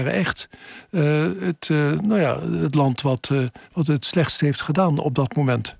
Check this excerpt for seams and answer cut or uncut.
uncut